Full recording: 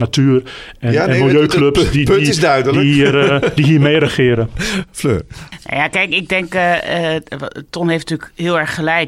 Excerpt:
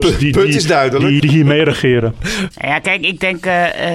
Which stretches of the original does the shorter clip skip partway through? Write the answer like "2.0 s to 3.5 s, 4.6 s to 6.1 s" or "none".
2.9 s to 3.5 s, 4.9 s to 5.6 s